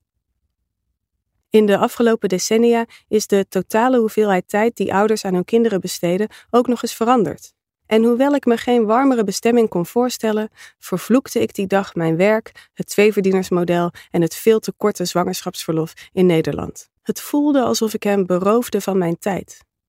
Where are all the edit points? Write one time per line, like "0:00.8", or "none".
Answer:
0:07.6
0:17.0